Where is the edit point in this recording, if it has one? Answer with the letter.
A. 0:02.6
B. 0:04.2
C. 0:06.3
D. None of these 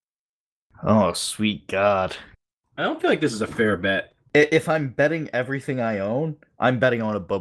A